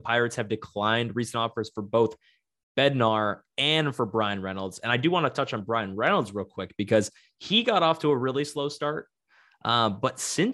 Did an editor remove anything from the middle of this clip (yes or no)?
no